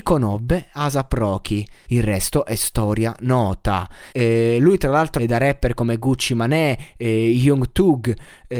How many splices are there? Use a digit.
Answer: 3